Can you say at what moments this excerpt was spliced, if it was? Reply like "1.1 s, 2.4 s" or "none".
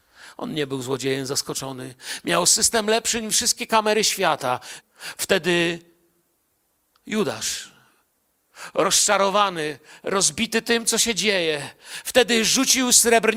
4.8 s

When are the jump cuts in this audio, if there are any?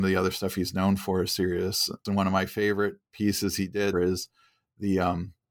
2.1 s, 3.9 s

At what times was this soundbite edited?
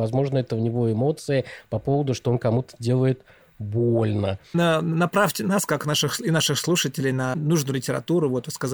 none

